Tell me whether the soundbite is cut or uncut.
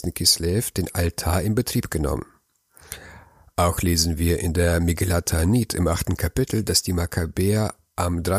uncut